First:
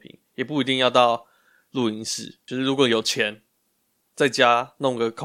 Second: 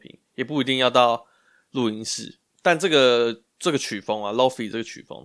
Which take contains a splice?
second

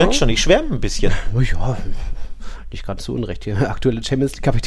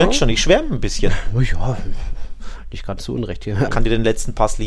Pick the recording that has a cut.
second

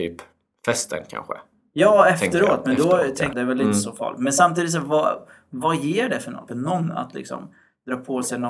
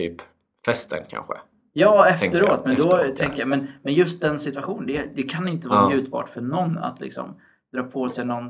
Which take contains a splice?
first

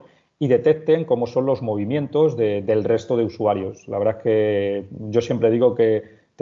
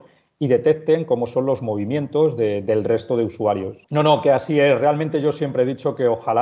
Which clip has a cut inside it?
second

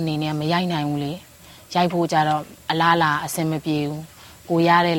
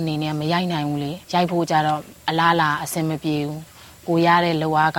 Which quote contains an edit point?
second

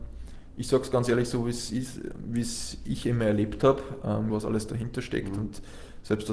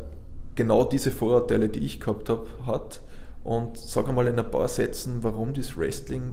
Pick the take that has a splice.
first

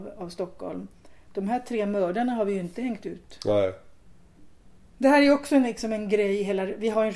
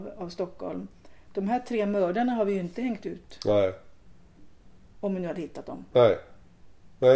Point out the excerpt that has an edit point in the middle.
first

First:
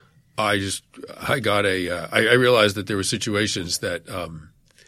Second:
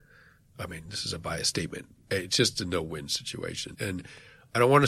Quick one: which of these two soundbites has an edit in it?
second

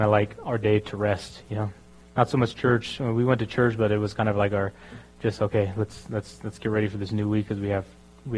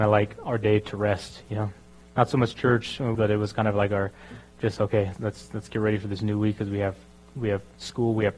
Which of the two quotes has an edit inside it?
second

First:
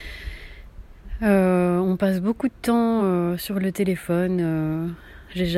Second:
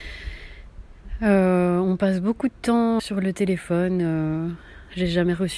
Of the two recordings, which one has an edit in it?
second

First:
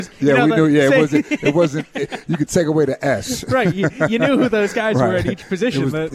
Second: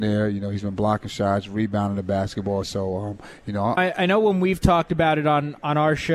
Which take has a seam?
second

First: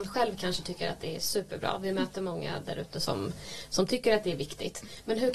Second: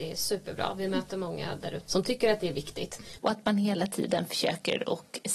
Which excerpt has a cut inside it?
second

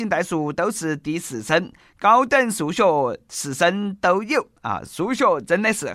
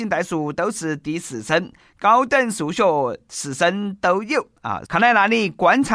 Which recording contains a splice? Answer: second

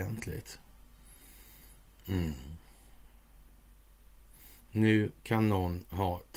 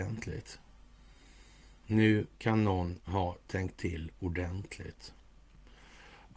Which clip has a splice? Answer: second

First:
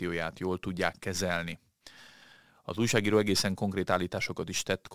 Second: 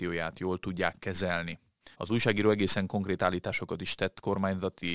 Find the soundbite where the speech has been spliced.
second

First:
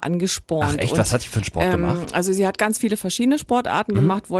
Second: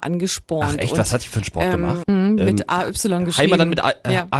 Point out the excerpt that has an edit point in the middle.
second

